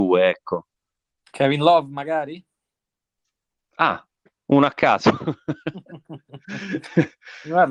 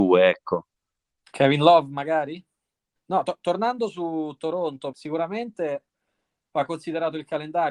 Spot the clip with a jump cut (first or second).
second